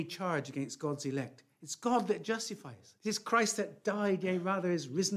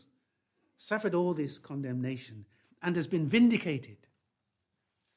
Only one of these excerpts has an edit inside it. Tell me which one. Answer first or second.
first